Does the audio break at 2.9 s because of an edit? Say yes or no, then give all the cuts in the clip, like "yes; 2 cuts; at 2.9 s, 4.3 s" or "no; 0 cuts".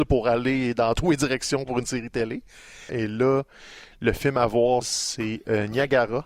yes; 2 cuts; at 2.9 s, 4.8 s